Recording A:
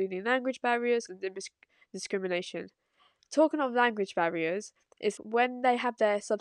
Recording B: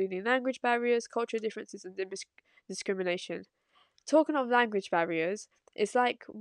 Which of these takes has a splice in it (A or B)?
A